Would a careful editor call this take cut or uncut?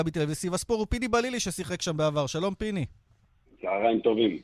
uncut